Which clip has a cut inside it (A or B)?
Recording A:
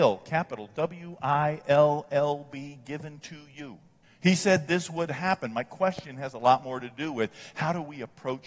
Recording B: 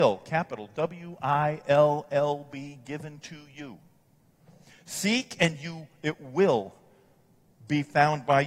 A